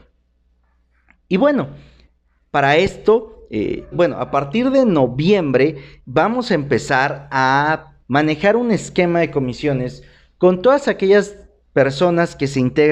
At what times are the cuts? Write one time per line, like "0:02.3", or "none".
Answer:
0:03.9
0:06.0
0:08.0